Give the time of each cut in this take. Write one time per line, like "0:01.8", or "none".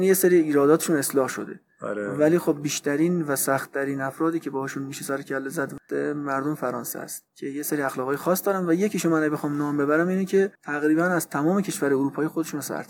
0:07.3
0:10.6